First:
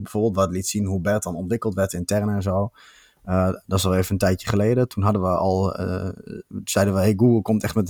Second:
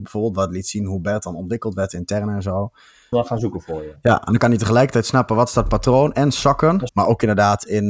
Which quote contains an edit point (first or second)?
second